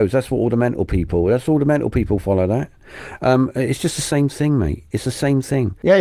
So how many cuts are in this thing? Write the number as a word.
one